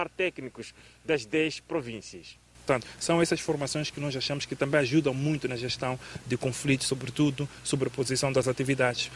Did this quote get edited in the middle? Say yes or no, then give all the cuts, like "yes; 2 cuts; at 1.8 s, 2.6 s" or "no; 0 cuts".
no; 0 cuts